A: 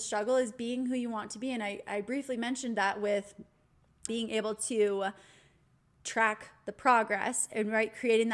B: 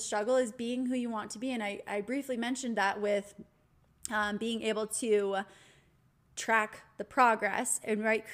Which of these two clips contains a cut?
A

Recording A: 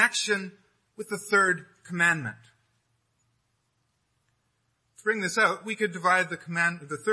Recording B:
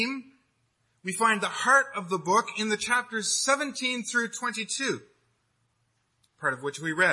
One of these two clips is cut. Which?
B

